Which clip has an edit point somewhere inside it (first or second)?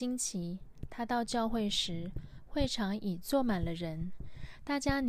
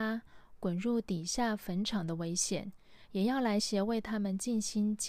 second